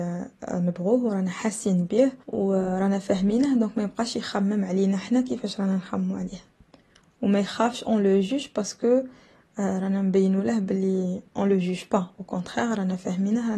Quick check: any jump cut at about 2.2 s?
yes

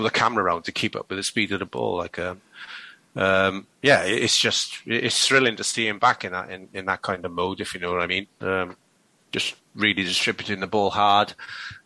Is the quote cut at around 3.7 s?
yes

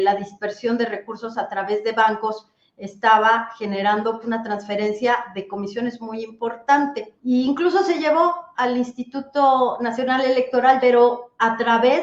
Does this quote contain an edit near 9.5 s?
no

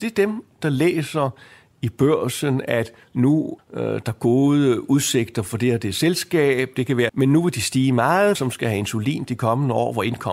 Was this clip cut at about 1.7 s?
no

